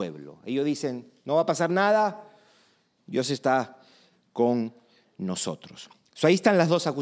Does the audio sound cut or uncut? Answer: uncut